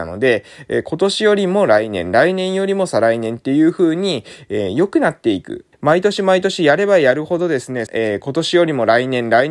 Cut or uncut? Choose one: cut